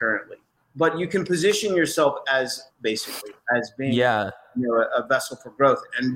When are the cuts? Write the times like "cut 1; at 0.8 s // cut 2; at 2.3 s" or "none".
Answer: cut 1; at 2.7 s